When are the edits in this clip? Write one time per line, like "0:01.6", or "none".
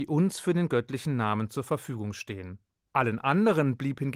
0:02.9